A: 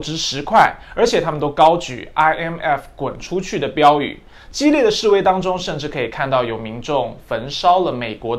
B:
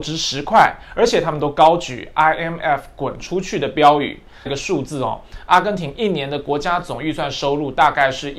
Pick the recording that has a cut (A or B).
B